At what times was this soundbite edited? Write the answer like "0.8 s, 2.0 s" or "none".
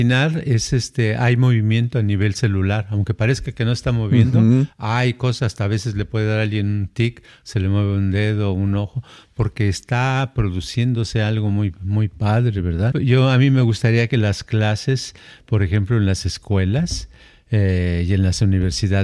12.9 s